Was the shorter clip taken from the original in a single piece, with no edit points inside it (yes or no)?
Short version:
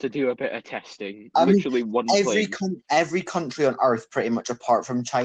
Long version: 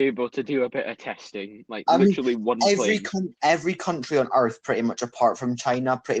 no